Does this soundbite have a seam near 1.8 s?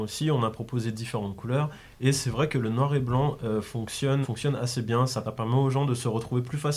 no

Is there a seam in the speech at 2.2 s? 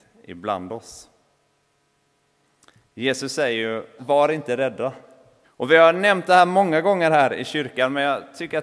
no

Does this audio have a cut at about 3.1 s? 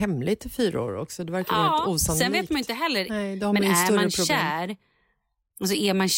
yes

